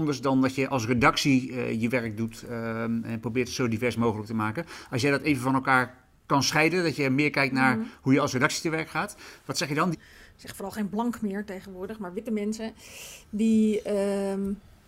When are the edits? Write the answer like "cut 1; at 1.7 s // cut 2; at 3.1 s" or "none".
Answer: cut 1; at 9.9 s